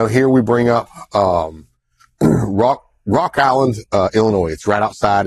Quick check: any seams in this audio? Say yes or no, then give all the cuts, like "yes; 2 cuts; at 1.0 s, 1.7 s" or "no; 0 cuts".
no; 0 cuts